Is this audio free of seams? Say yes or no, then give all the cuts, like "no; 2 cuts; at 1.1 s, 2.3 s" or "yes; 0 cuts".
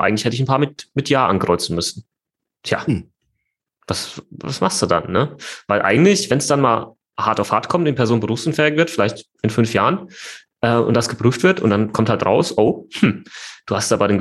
yes; 0 cuts